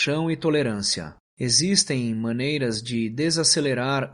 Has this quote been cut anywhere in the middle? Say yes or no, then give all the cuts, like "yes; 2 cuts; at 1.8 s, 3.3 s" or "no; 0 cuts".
yes; 1 cut; at 1.3 s